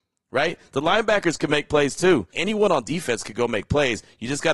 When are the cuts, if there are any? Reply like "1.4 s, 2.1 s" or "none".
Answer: 2.3 s